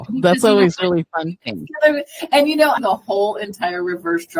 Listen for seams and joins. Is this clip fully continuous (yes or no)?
no